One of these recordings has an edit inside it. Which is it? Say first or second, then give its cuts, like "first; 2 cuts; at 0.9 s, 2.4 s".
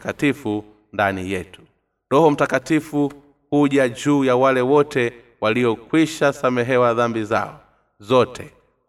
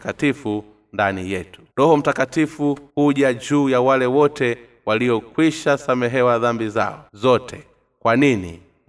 second; 3 cuts; at 1.7 s, 2.9 s, 7.1 s